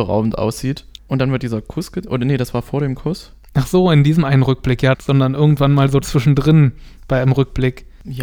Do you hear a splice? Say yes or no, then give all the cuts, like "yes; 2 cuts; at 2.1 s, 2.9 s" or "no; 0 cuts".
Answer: yes; 2 cuts; at 1.0 s, 4.9 s